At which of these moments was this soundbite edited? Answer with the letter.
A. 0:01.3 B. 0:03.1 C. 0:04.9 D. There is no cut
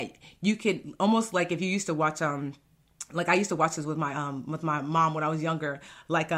D